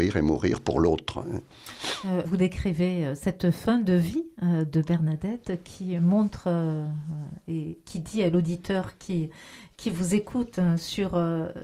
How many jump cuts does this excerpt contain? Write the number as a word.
one